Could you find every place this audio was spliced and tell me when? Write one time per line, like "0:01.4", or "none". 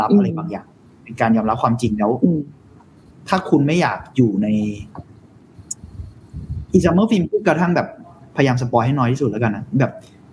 none